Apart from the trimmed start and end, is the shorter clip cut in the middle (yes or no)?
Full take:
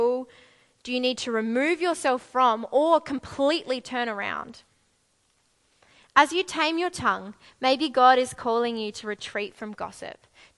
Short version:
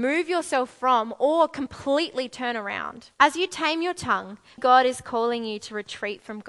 yes